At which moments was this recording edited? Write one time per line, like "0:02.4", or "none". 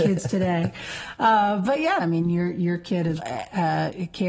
0:02.0
0:03.2

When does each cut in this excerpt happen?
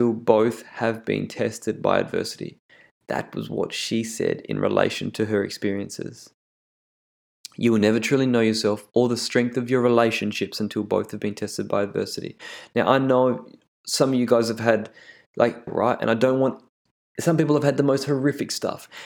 0:15.7

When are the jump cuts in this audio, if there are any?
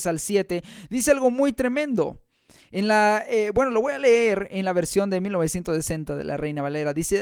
none

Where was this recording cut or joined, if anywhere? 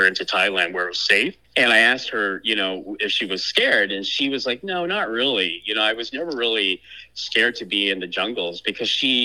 0:01.4

